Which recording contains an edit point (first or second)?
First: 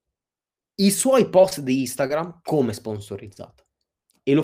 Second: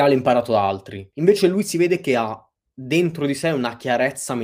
second